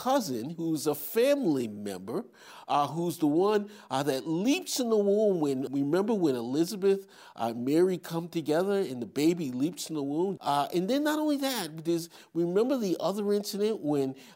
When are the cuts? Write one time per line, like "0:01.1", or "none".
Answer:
0:05.7
0:10.4